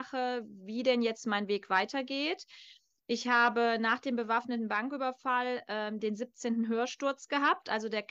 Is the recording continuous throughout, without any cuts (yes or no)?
yes